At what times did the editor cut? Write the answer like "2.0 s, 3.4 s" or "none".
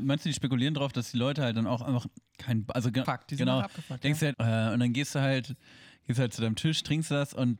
3.0 s, 4.3 s

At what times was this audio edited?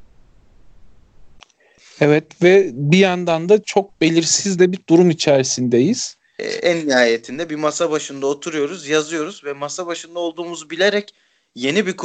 6.4 s

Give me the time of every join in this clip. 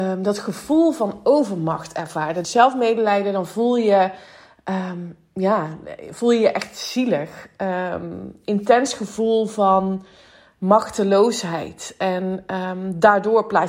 2.4 s

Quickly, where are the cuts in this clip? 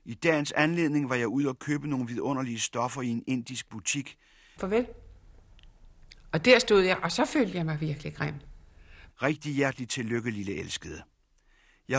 4.6 s, 6.2 s, 9.1 s

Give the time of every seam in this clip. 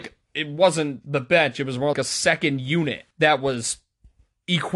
1.9 s, 3.1 s

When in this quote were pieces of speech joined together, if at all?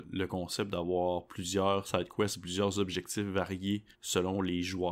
3.9 s

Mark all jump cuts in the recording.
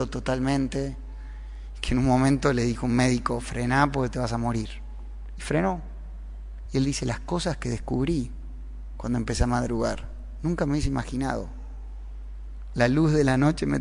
6.7 s

